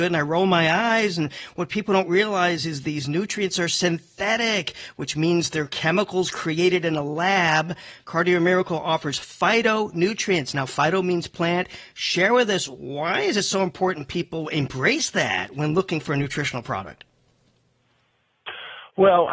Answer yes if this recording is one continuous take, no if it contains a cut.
yes